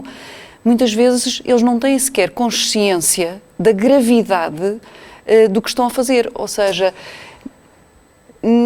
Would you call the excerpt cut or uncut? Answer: cut